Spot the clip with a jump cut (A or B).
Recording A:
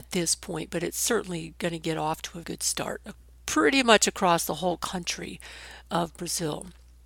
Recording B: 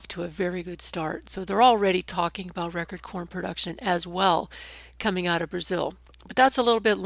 A